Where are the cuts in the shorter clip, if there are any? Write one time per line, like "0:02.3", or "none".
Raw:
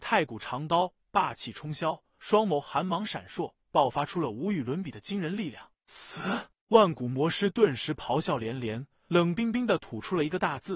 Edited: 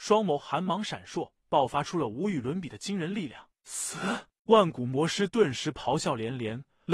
none